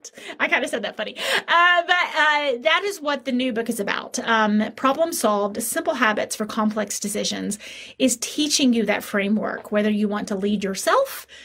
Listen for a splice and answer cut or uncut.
uncut